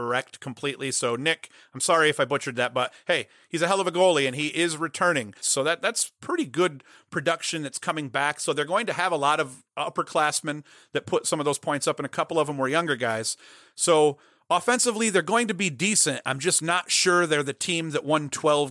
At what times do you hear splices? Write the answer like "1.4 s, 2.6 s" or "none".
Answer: 5.4 s